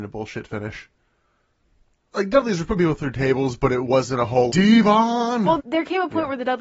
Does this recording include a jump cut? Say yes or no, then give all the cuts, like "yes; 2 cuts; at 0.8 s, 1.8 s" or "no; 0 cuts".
yes; 3 cuts; at 2.1 s, 4.5 s, 5.6 s